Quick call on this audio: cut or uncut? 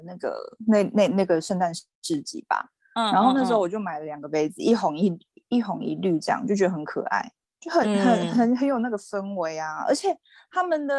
uncut